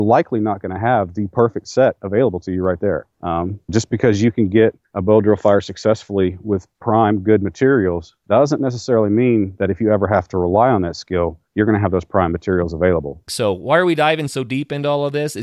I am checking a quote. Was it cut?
yes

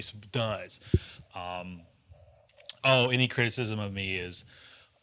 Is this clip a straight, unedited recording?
no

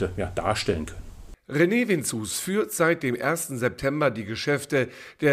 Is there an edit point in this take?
no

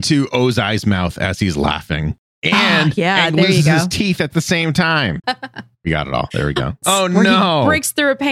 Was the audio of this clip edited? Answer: yes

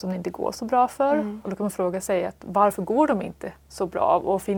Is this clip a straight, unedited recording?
no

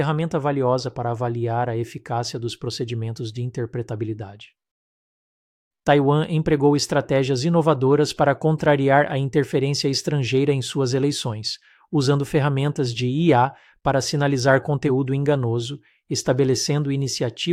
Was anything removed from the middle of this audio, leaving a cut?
yes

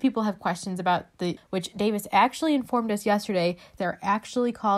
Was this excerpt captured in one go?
no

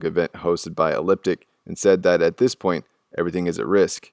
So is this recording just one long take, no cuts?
yes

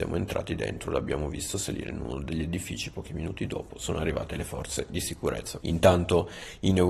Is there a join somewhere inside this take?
yes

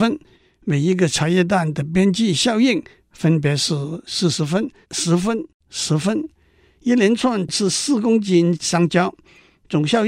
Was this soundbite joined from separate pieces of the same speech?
yes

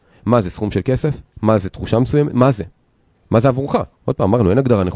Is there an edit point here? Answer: yes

